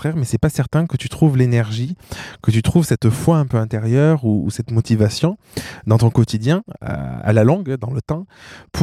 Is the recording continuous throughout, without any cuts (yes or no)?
yes